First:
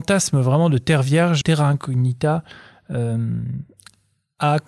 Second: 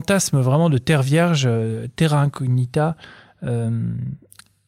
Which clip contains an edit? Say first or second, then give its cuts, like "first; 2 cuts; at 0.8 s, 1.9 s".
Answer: first; 1 cut; at 1.4 s